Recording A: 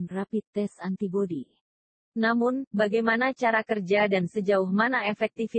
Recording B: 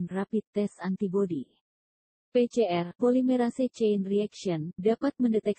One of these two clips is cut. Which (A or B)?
A